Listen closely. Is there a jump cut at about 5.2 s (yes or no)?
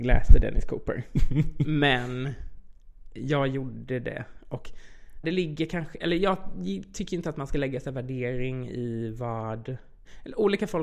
yes